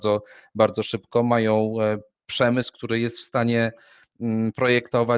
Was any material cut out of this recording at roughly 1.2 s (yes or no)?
no